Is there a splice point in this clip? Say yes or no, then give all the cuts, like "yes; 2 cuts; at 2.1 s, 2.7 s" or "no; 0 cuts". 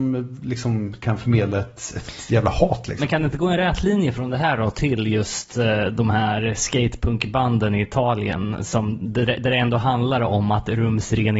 no; 0 cuts